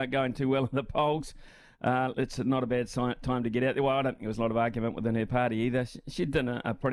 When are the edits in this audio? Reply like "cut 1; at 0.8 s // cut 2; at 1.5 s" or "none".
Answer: cut 1; at 2.1 s